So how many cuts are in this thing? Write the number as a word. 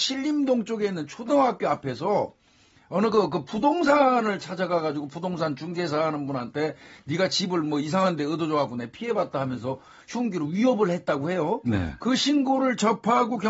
zero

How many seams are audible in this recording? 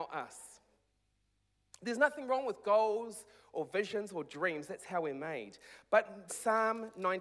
two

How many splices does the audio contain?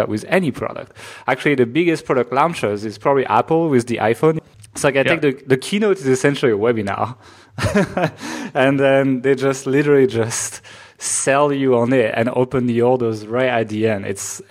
zero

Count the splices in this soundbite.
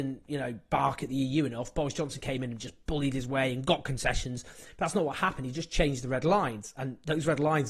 zero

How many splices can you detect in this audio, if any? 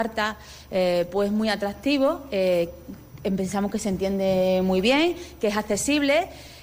zero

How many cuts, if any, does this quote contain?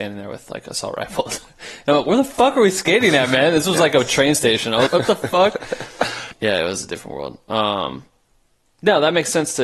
two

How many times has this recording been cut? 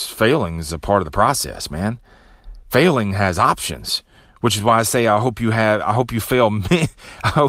zero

